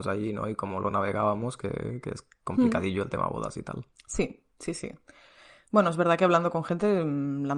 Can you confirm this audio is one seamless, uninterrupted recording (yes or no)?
yes